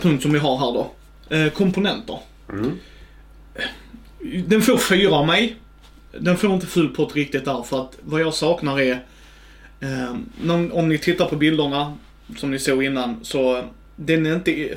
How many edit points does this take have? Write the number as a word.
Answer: zero